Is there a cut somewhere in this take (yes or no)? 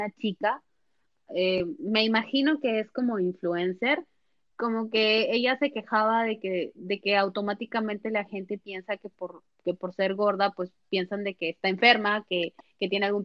no